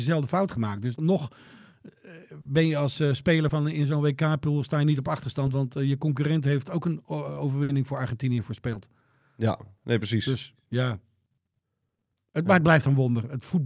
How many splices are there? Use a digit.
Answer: 1